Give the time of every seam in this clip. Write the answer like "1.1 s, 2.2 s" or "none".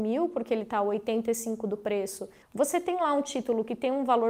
2.4 s